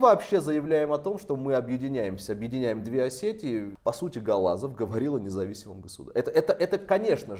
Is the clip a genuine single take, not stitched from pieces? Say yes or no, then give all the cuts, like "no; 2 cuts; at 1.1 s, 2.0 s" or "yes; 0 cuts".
yes; 0 cuts